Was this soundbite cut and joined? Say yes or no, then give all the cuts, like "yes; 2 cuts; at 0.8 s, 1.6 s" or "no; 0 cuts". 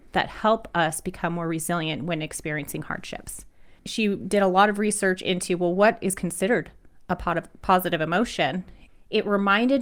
no; 0 cuts